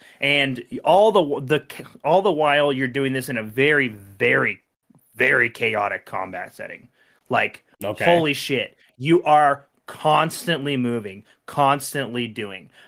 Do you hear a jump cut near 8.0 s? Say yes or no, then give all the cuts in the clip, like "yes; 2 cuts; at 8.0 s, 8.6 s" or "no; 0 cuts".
no; 0 cuts